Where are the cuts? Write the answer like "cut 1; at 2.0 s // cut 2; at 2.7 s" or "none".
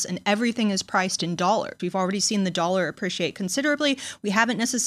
cut 1; at 1.8 s

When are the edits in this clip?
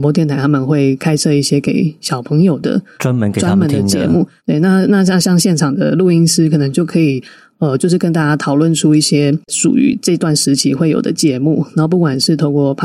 none

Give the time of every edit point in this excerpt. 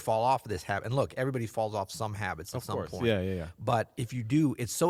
none

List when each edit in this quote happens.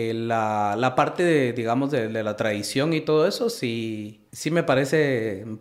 cut 1; at 4.3 s

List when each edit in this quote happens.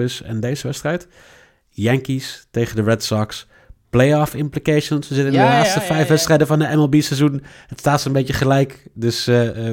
none

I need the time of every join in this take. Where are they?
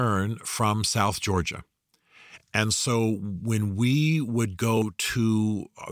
none

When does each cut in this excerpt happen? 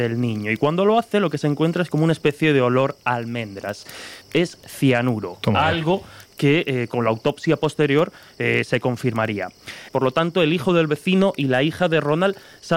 cut 1; at 4.2 s // cut 2; at 9.9 s

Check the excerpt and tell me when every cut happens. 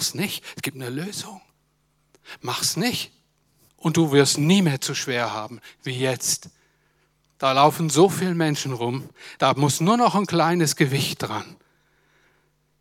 cut 1; at 3.7 s

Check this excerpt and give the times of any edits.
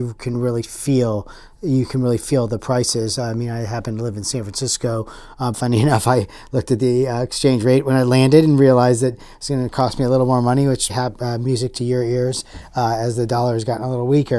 cut 1; at 5.5 s // cut 2; at 10.9 s

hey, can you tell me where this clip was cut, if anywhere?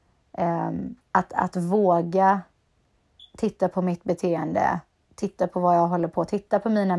cut 1; at 1.0 s

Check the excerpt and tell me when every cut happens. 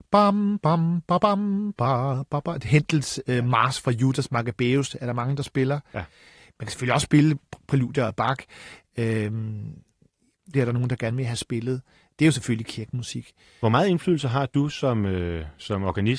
cut 1; at 10.5 s

